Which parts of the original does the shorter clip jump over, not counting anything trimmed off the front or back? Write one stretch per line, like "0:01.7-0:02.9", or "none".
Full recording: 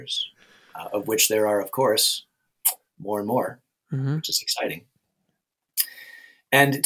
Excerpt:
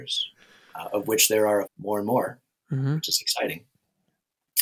0:01.6-0:02.8

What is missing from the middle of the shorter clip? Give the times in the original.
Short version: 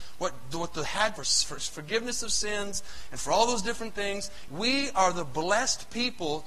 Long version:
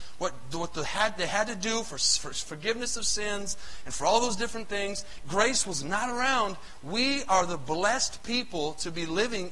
0:01.2-0:01.9
0:05.2-0:06.8

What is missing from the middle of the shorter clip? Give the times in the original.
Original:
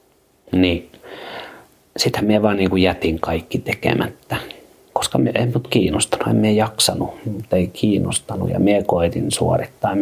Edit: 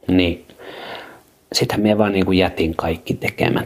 none

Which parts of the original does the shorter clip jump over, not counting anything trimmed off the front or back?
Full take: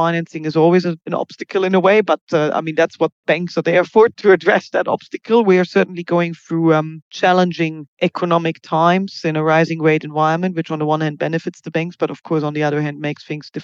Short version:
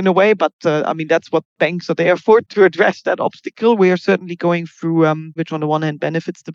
0:07.0-0:10.5

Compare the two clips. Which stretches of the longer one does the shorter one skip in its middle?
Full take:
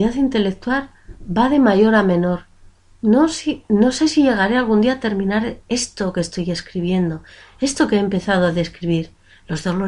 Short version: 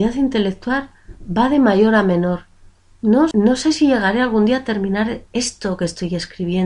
0:03.3-0:03.7

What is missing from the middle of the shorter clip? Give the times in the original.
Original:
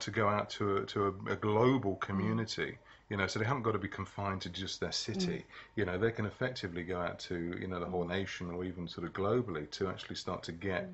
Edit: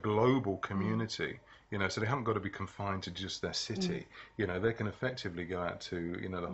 none

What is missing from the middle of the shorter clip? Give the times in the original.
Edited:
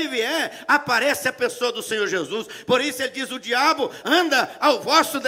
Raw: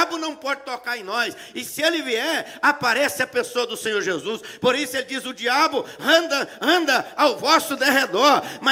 0:06.0-0:06.6

